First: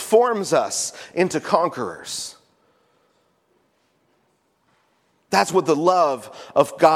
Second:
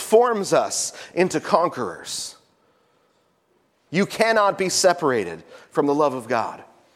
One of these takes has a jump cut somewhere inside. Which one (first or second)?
second